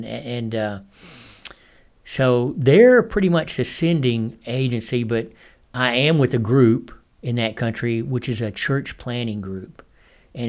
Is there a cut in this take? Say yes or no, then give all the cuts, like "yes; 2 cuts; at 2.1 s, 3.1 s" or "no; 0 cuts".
no; 0 cuts